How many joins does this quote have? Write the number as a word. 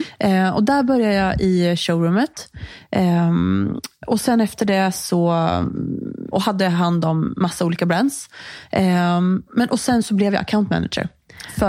one